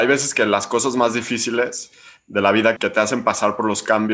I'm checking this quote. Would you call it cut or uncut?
cut